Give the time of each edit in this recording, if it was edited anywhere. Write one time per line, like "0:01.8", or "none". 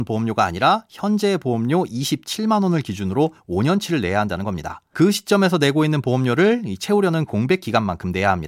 0:04.9